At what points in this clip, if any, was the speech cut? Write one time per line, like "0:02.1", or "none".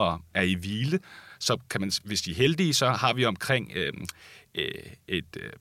none